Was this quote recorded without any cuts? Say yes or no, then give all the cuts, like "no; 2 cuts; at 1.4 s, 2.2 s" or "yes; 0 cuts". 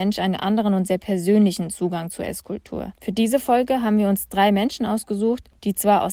no; 1 cut; at 3.0 s